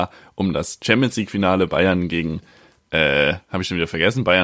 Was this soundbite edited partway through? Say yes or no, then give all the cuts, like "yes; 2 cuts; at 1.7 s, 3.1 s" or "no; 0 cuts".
no; 0 cuts